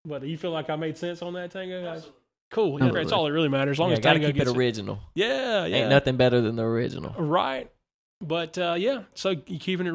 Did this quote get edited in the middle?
yes; 1 cut; at 2.9 s

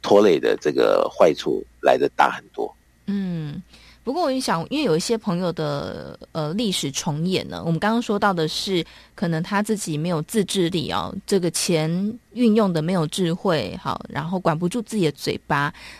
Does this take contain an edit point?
no; 0 cuts

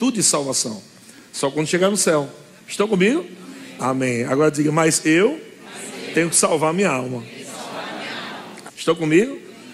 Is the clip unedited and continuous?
no; 2 cuts; at 3.8 s, 8.7 s

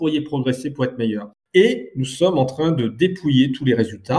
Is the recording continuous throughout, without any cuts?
no; 1 cut; at 1.4 s

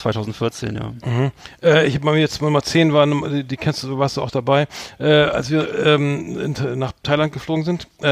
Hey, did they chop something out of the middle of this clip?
no; 0 cuts

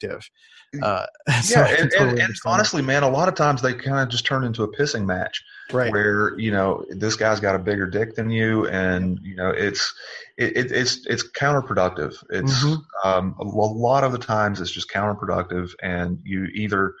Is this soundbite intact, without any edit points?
yes; 0 cuts

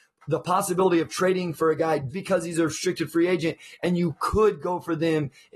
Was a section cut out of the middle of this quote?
yes; 1 cut; at 2.1 s

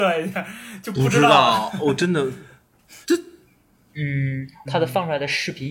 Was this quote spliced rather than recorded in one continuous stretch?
yes; 2 cuts; at 3.0 s, 4.7 s

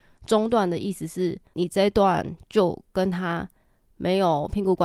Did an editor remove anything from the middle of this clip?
yes; 1 cut; at 1.5 s

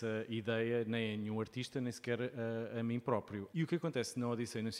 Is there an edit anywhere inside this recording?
yes; 1 cut; at 3.5 s

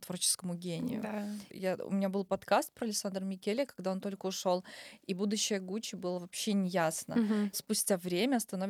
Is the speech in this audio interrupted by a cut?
yes; 2 cuts; at 1.5 s, 7.5 s

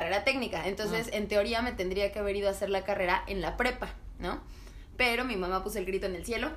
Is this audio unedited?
yes; 0 cuts

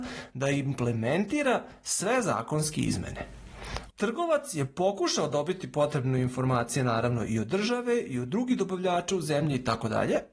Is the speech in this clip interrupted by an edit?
yes; 1 cut; at 3.9 s

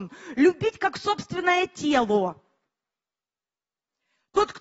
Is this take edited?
no; 0 cuts

